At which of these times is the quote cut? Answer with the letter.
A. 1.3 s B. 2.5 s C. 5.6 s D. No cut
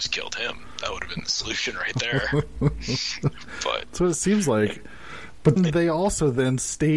C